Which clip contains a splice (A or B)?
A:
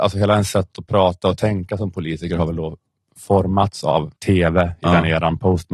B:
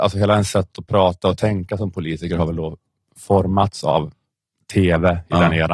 A